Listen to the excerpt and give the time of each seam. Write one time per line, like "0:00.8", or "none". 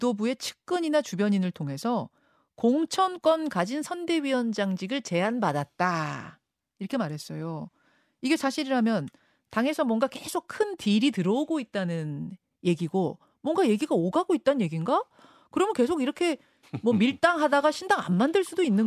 none